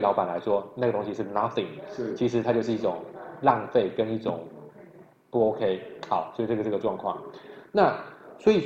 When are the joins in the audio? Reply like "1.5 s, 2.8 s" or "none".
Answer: none